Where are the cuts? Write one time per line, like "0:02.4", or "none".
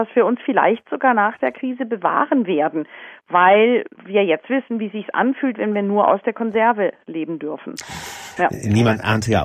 0:03.9
0:08.4